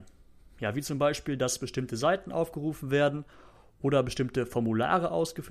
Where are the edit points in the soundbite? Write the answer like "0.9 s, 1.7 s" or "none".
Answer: none